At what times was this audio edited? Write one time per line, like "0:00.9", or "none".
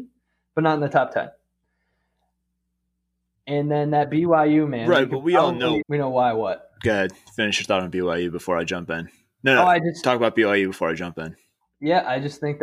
0:05.8